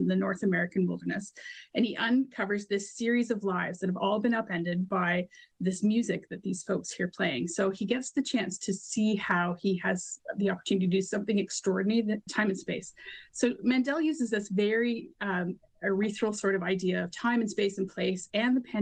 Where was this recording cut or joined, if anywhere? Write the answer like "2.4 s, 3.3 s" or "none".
12.3 s